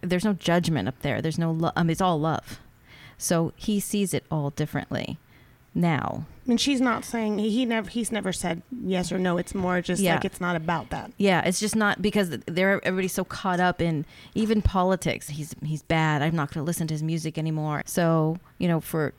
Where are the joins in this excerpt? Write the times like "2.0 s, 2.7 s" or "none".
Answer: 15.3 s, 17.8 s